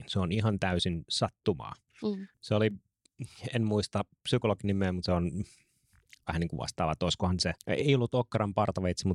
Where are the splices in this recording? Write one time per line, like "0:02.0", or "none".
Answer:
0:02.3